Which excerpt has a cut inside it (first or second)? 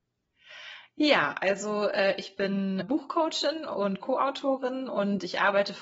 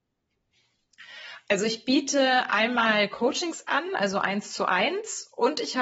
first